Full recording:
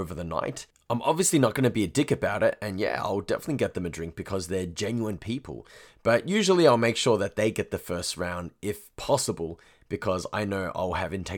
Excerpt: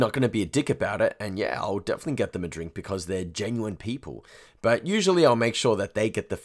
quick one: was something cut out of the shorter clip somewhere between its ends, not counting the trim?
no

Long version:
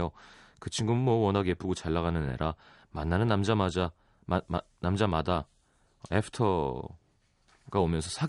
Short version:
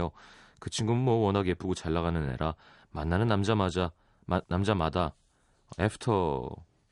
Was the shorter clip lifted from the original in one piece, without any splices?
no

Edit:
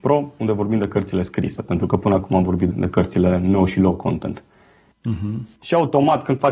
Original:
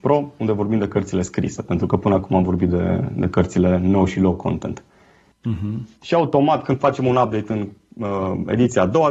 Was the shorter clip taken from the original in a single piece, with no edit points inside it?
no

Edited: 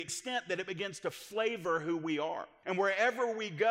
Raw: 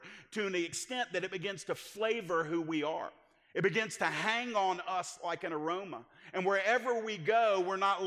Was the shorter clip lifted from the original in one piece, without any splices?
no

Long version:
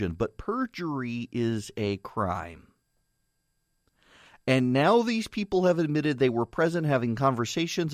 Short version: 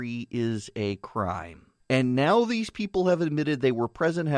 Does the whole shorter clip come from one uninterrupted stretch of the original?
no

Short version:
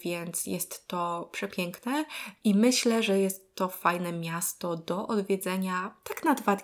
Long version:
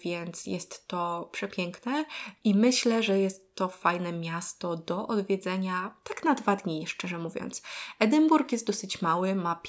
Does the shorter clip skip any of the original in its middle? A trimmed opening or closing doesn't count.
no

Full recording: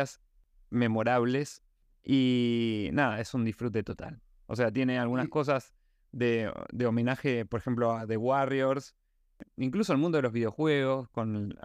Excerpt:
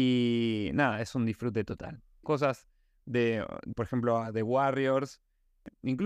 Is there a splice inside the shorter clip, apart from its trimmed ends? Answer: yes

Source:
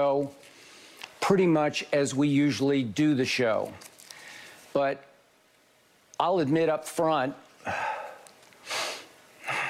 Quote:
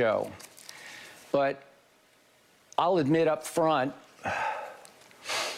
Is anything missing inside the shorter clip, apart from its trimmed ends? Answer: no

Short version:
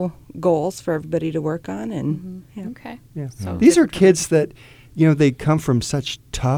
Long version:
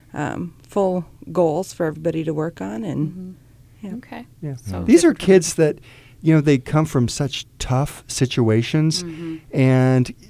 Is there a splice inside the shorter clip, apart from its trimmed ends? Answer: yes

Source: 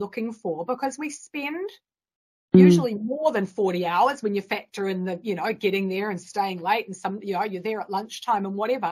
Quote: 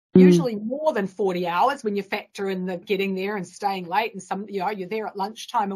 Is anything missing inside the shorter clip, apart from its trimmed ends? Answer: yes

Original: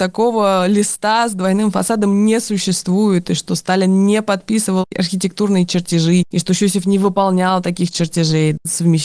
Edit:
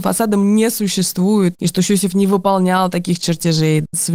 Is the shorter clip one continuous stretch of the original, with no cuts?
no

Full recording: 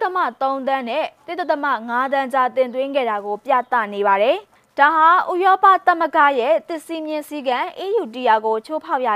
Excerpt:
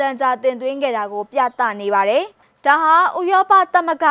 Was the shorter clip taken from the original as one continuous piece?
yes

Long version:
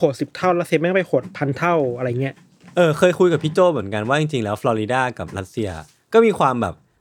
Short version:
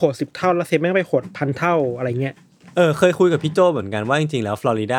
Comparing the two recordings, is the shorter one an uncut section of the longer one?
yes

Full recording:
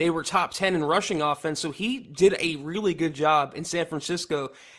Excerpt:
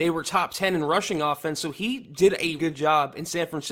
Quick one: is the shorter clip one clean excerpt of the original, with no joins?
no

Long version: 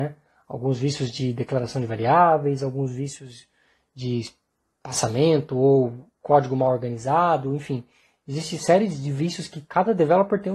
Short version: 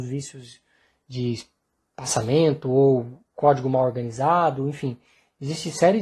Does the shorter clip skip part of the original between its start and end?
no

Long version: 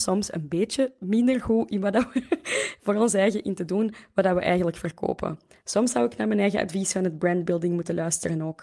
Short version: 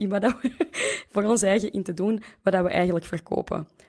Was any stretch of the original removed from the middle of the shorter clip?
no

